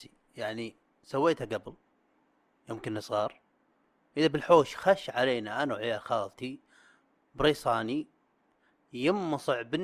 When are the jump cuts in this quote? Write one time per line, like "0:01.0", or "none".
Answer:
none